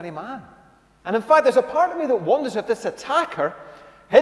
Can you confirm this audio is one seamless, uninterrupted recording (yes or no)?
no